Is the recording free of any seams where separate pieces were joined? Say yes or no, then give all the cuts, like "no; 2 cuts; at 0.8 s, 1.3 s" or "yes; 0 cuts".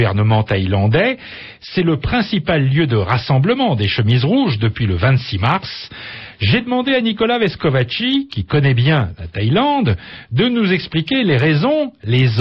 yes; 0 cuts